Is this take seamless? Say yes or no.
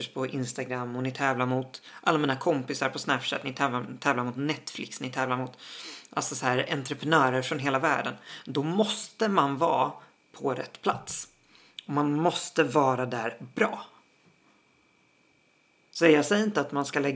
yes